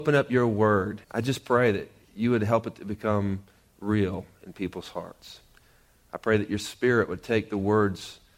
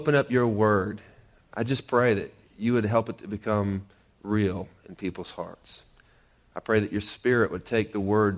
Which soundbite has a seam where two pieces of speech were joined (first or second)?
first